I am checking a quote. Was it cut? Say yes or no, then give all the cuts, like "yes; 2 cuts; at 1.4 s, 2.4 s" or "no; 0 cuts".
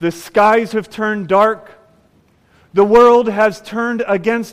no; 0 cuts